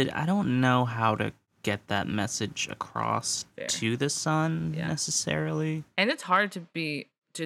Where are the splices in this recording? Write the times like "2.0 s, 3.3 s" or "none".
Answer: none